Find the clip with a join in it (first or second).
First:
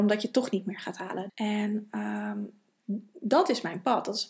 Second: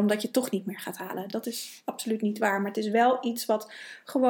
first